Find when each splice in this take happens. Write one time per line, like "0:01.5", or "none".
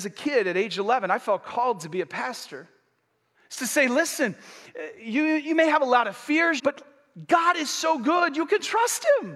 0:03.3
0:06.6